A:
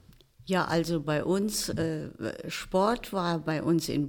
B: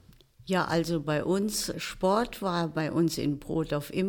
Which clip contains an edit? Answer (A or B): B